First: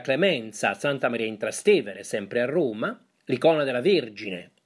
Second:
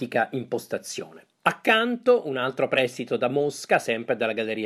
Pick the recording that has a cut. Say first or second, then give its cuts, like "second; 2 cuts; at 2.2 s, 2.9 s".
second; 1 cut; at 1.3 s